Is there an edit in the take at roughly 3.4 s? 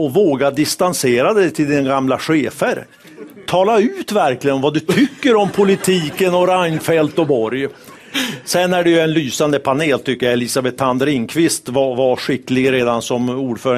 no; 0 cuts

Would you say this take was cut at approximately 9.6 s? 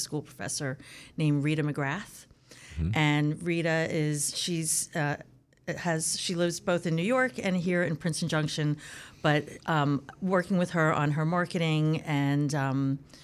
no; 0 cuts

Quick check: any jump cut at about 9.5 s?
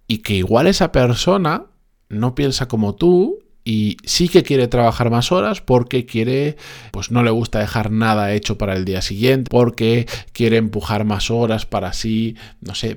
yes; 2 cuts; at 6.9 s, 9.5 s

